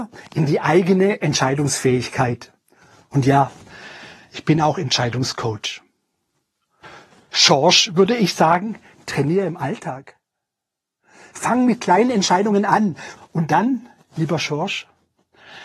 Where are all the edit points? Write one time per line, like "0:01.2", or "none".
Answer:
0:13.2